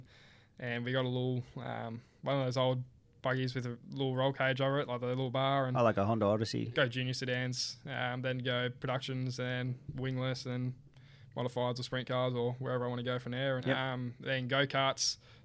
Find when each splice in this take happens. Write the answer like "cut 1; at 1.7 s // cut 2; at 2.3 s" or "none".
cut 1; at 6.7 s // cut 2; at 13.6 s

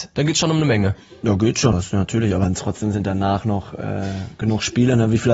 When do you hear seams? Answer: cut 1; at 1.7 s

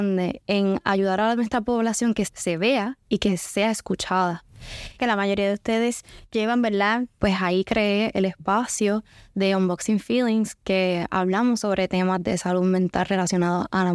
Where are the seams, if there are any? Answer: cut 1; at 2.2 s // cut 2; at 5.0 s // cut 3; at 7.2 s

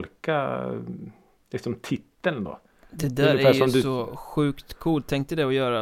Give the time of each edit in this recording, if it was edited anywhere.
none

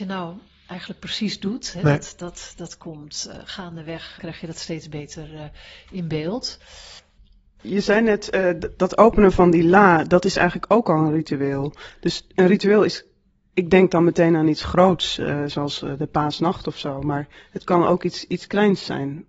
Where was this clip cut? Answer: cut 1; at 4.2 s

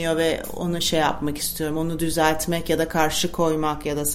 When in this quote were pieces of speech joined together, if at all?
none

